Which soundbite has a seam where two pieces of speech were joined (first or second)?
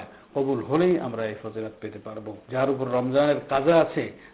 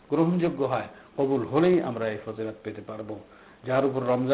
first